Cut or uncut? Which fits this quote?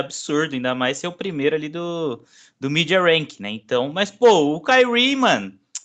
uncut